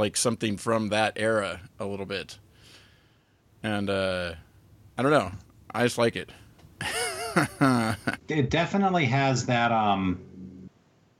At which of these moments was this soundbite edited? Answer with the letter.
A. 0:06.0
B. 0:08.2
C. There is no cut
B